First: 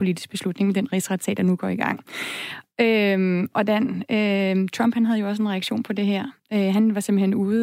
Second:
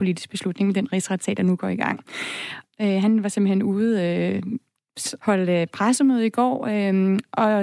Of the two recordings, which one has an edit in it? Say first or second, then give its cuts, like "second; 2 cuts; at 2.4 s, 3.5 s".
second; 2 cuts; at 2.7 s, 5.2 s